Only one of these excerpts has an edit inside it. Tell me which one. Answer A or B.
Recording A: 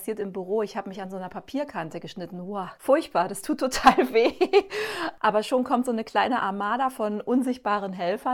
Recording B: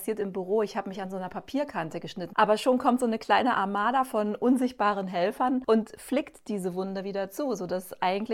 B